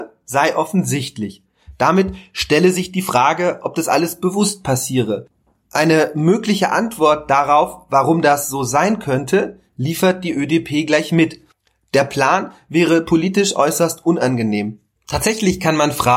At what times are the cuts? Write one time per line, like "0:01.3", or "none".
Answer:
0:15.0